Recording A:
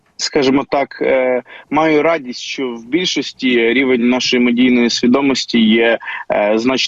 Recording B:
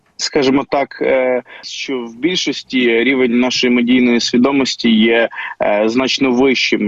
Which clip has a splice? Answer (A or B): B